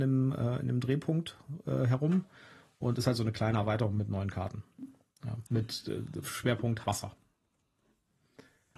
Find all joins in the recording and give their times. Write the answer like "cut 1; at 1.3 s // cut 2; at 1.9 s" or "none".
cut 1; at 5.5 s // cut 2; at 6.8 s

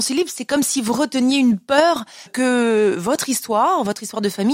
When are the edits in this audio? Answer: cut 1; at 2.3 s

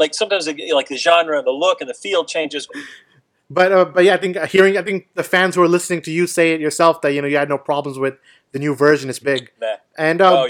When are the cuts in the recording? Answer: cut 1; at 2.7 s // cut 2; at 9.2 s

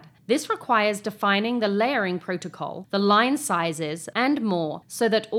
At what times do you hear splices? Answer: cut 1; at 4.1 s

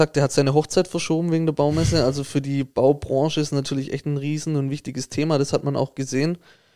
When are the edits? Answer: none

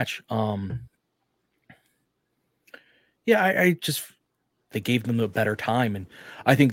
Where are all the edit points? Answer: cut 1; at 4.7 s

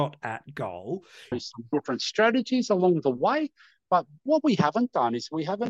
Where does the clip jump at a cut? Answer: cut 1; at 1.3 s // cut 2; at 3.9 s

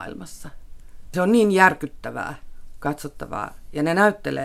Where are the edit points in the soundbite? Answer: cut 1; at 1.1 s

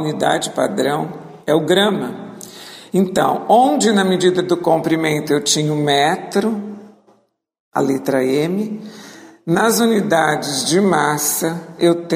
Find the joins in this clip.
none

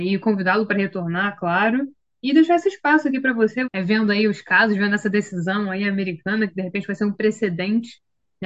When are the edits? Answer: cut 1; at 3.7 s

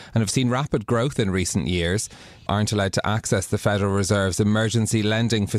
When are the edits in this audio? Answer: cut 1; at 2.5 s

